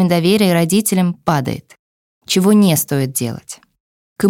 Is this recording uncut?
no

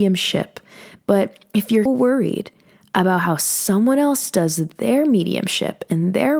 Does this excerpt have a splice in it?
yes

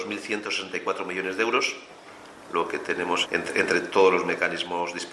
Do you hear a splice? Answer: yes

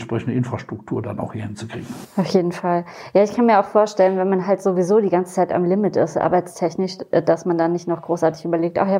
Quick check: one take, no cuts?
yes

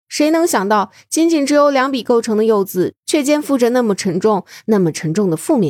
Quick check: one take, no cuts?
yes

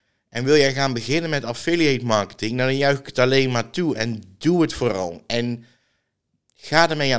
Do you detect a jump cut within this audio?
no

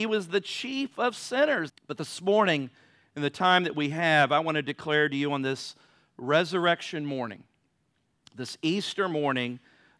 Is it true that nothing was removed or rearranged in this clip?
no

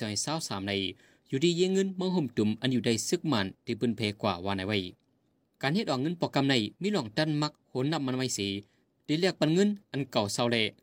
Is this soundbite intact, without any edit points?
yes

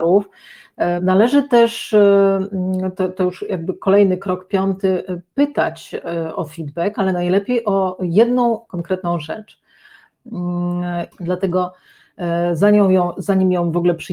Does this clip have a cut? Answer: yes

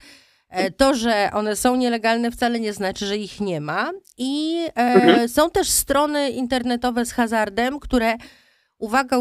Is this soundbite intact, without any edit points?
yes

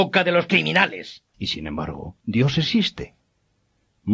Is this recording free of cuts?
no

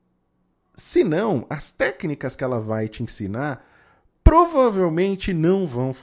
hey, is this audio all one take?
yes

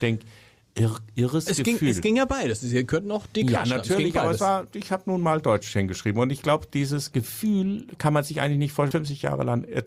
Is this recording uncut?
no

